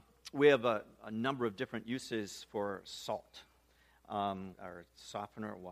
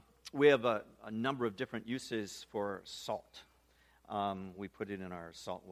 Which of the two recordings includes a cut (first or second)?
first